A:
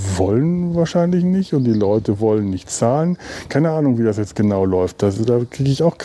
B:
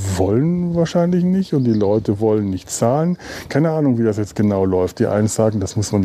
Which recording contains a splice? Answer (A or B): B